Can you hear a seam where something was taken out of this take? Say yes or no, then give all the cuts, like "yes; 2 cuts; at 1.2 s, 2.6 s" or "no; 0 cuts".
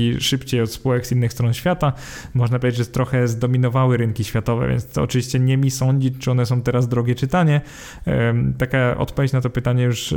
no; 0 cuts